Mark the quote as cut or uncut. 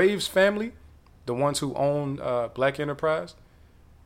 uncut